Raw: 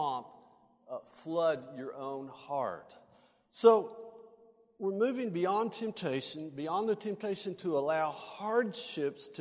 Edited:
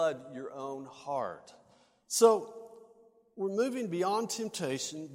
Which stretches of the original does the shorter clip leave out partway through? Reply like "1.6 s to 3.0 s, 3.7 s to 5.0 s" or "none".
none